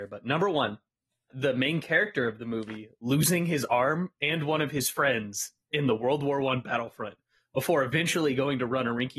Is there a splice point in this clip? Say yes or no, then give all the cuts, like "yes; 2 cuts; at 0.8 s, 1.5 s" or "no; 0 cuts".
yes; 1 cut; at 1.3 s